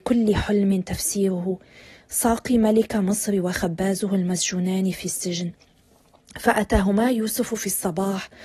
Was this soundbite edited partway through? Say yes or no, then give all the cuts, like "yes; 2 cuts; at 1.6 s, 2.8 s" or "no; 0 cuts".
no; 0 cuts